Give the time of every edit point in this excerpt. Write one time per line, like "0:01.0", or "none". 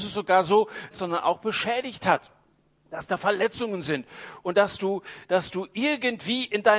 0:00.9